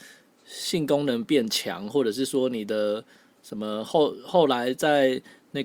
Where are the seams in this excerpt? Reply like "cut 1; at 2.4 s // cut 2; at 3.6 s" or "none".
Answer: none